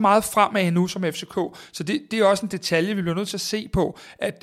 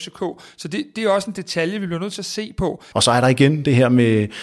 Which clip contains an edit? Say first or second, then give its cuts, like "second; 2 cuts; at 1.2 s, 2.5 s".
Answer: second; 1 cut; at 2.9 s